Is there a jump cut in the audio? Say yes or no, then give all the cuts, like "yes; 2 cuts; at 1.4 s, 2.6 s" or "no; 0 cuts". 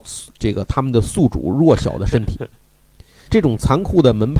yes; 1 cut; at 3.3 s